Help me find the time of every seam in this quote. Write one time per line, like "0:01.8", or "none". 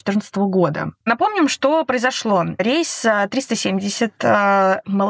0:01.0